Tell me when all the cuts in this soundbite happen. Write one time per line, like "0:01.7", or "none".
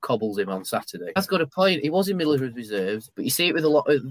0:01.2
0:03.1